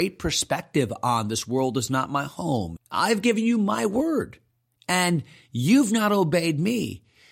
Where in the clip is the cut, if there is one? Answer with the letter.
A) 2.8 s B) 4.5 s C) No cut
A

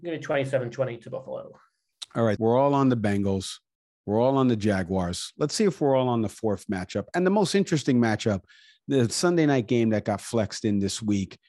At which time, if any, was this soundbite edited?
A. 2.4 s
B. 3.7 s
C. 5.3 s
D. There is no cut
A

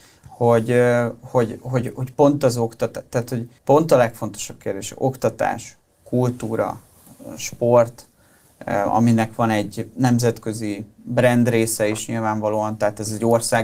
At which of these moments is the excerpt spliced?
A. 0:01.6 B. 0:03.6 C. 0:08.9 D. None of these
B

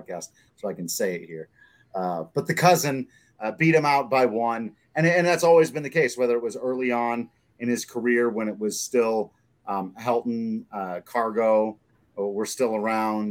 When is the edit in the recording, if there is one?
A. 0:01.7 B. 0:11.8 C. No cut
C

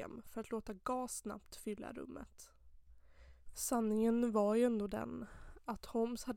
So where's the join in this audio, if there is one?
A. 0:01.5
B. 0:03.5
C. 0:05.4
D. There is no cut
B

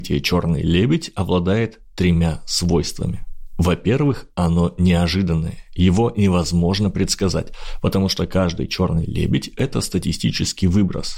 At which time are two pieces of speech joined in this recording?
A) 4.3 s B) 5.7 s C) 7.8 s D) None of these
D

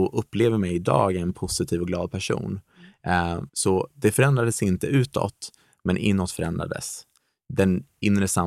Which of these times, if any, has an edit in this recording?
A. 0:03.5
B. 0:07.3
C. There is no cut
A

